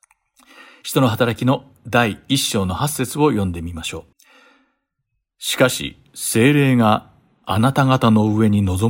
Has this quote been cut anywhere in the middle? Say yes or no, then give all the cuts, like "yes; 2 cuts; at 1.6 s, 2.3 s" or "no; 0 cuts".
yes; 1 cut; at 4.1 s